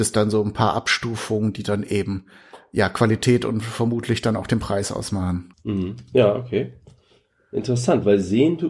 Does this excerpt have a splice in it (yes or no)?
yes